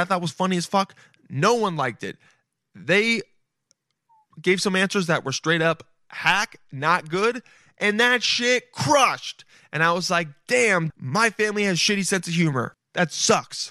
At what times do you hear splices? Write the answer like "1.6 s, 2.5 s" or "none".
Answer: 10.9 s, 12.7 s